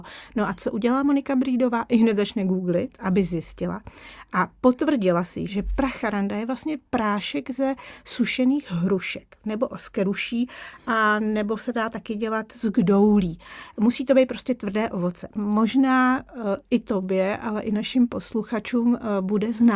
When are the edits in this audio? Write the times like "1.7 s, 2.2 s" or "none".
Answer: 5.5 s, 15.4 s